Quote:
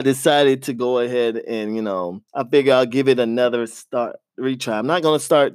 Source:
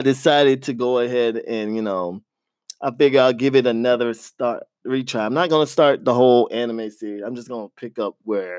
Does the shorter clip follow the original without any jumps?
no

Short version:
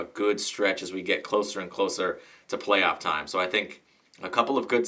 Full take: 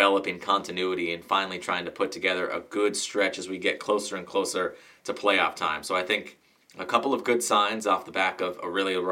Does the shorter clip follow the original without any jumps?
yes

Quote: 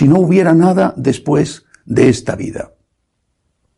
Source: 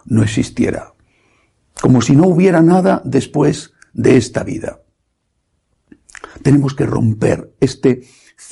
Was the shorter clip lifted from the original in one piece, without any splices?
yes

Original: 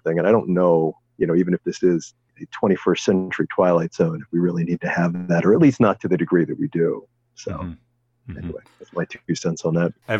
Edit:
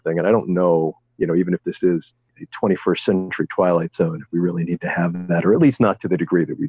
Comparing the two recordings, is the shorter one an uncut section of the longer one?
yes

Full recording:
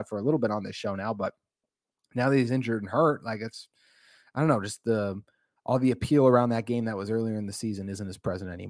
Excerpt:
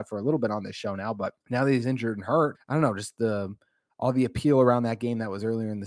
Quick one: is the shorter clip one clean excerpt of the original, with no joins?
no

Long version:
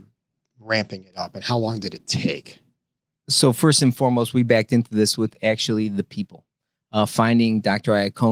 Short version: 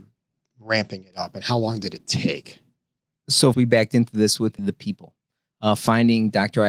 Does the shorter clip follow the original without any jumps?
no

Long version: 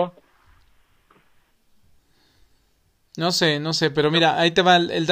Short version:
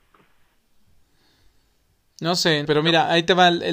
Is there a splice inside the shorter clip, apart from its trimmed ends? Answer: yes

